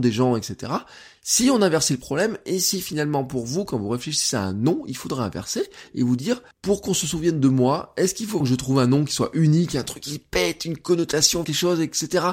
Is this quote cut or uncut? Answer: cut